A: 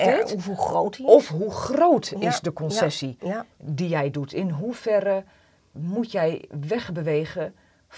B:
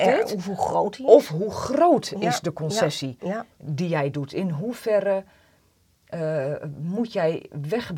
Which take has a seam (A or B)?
A